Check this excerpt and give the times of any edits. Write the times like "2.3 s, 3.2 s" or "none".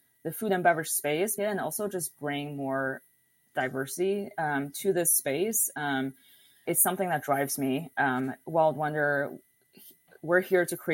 1.4 s, 6.7 s